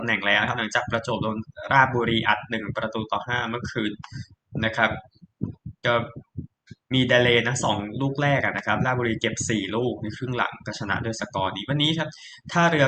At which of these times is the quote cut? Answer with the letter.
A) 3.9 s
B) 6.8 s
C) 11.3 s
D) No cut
B